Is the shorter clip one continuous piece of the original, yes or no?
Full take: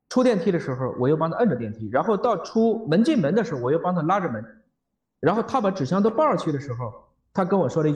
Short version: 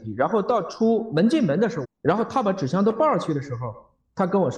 no